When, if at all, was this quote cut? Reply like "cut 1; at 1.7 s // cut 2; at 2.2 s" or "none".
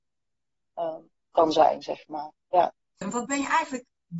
cut 1; at 3.0 s